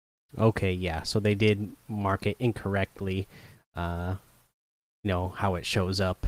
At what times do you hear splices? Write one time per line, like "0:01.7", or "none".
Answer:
none